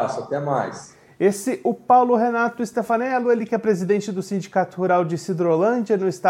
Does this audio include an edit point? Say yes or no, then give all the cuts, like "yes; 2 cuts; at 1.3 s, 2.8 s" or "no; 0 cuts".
no; 0 cuts